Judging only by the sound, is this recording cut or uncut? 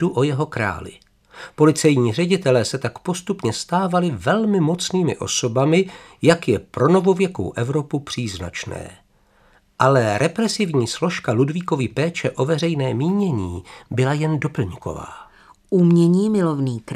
uncut